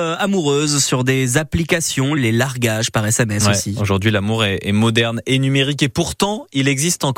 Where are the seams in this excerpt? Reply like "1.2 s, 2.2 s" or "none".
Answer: 2.2 s